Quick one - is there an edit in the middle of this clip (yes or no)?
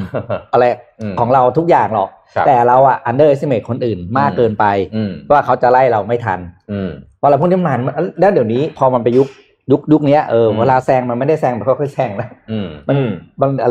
no